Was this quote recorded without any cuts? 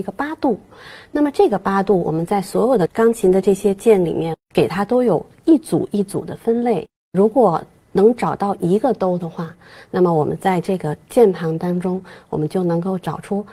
yes; 0 cuts

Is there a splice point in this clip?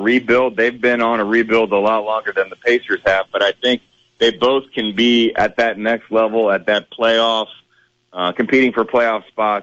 no; 0 cuts

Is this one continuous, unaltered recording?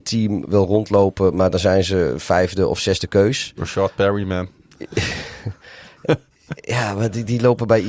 yes; 0 cuts

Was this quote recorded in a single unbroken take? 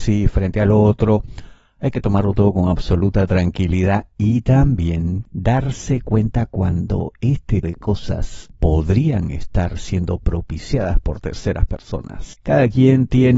no; 1 cut; at 7.6 s

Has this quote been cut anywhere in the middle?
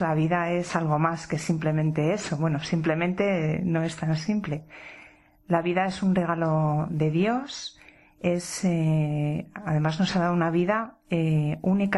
no; 0 cuts

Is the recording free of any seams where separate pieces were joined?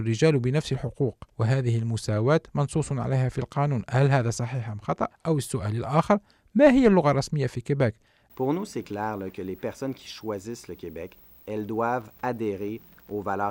no; 1 cut; at 8.3 s

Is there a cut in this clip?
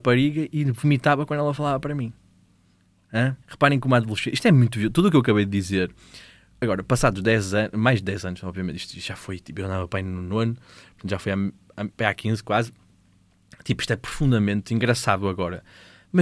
yes; 1 cut; at 3.4 s

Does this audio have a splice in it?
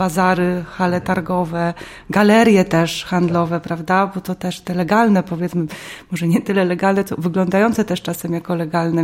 no; 0 cuts

